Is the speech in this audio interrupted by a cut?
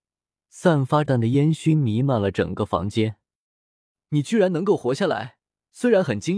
yes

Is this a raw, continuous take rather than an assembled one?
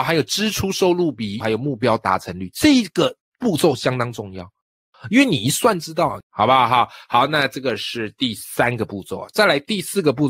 no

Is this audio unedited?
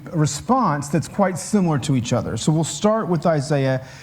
yes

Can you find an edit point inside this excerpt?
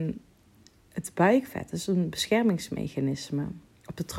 no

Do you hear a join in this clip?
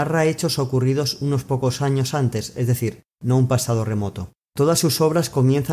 no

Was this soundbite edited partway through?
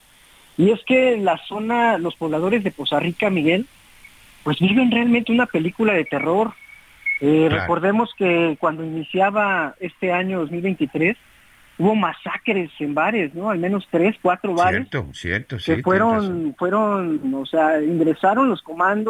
no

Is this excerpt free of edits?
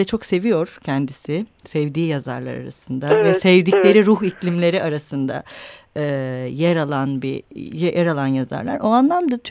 yes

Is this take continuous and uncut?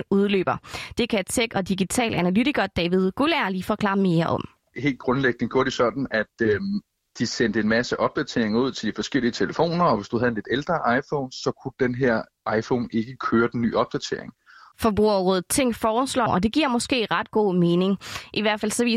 no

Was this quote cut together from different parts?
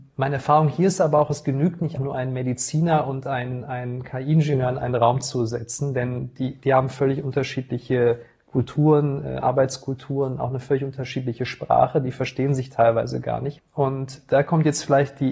yes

